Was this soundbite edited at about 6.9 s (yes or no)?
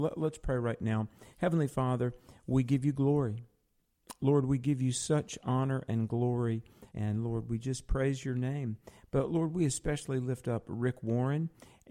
yes